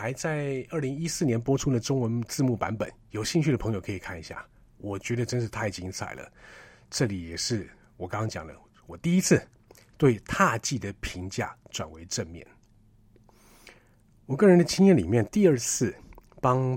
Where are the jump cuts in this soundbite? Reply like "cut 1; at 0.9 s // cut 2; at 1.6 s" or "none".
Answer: none

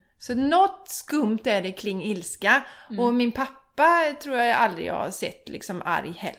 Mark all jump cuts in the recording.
cut 1; at 1.7 s

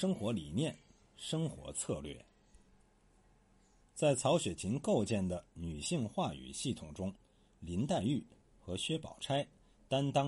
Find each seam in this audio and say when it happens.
cut 1; at 7.5 s

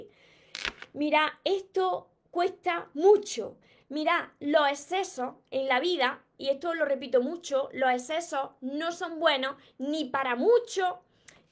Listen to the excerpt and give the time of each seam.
cut 1; at 3.8 s

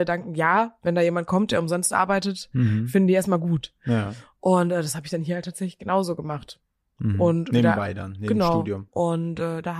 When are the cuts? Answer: cut 1; at 8.9 s

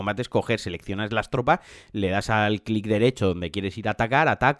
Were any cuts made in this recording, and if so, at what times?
none

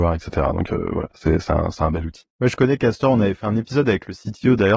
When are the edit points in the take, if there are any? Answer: none

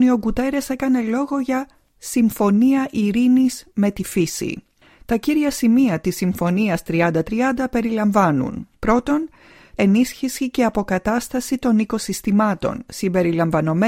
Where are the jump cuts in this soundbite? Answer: cut 1; at 9.8 s

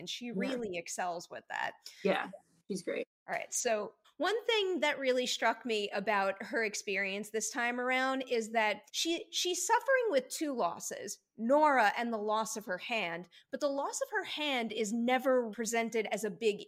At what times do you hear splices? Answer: cut 1; at 4.0 s // cut 2; at 8.9 s // cut 3; at 15.5 s

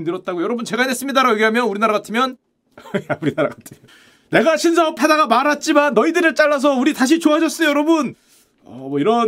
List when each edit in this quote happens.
cut 1; at 3.9 s

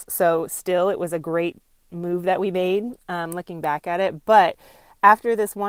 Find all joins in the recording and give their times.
none

